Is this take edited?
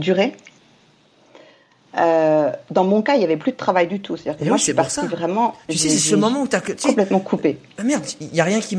no; 0 cuts

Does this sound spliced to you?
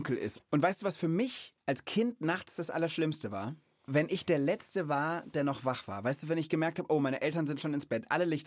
yes; 1 cut; at 3.9 s

